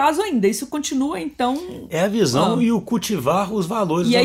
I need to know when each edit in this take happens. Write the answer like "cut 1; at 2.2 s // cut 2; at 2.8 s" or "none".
none